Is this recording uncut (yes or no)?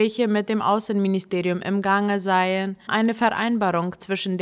no